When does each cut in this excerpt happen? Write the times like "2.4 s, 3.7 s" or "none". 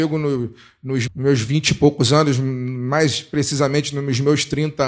1.1 s